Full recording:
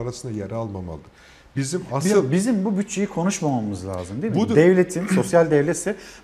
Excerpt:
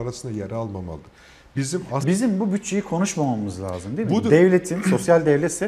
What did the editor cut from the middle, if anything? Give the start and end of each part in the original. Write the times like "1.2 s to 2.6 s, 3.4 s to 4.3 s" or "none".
2.0 s to 2.3 s